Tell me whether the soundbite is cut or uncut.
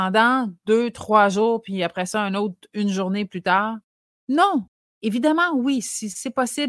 uncut